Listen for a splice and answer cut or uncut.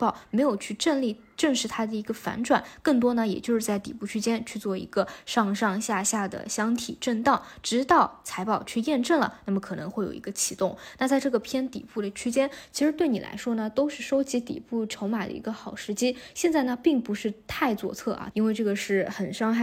cut